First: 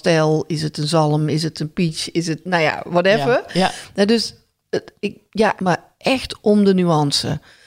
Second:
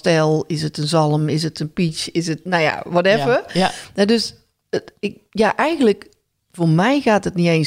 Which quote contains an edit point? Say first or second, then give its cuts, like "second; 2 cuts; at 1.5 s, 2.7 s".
first; 1 cut; at 5.6 s